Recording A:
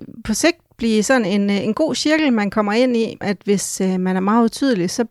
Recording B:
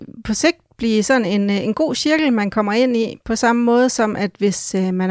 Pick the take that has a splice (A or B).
A